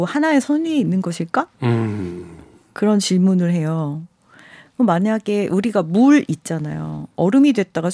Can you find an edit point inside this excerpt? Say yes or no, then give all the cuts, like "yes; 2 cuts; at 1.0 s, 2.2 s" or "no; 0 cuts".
yes; 1 cut; at 1.5 s